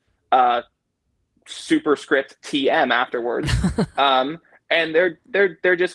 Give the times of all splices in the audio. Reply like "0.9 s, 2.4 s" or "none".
none